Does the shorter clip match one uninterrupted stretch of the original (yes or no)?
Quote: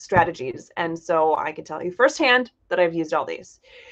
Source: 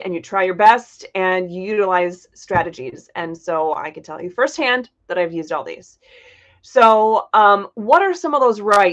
yes